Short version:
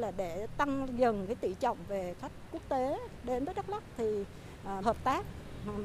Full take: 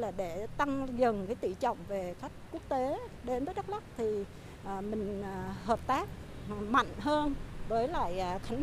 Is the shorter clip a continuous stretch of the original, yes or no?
no